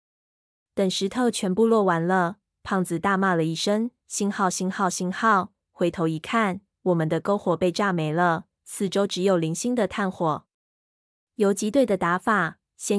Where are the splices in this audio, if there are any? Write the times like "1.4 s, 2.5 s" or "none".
none